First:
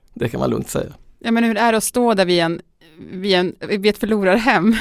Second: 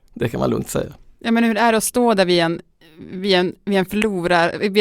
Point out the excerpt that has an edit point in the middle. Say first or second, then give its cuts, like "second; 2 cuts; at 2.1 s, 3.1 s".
first; 1 cut; at 3.6 s